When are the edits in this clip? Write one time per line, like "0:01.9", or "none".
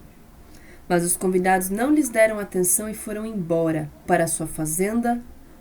0:04.0